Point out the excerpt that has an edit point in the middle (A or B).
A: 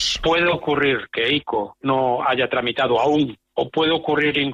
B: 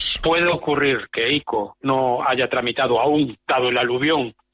A